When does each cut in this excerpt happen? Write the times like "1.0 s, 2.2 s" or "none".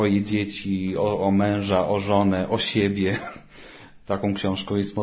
none